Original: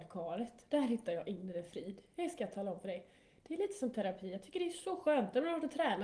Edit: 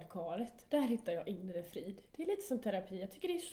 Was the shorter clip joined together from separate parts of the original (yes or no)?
yes